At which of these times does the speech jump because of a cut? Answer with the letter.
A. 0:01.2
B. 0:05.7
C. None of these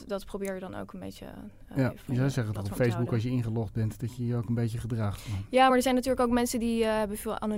C